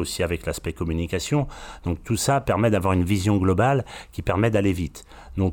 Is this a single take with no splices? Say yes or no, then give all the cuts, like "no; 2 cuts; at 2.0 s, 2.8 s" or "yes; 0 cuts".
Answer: yes; 0 cuts